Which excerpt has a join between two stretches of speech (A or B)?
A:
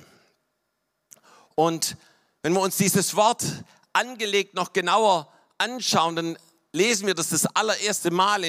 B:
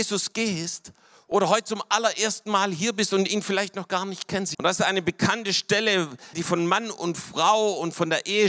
B